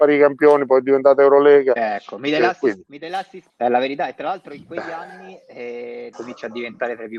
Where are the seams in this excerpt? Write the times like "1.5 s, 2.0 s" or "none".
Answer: 3.5 s, 6.1 s